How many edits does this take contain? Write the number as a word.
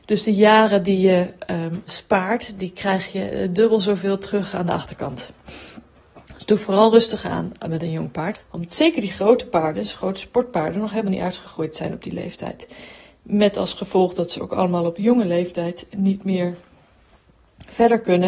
three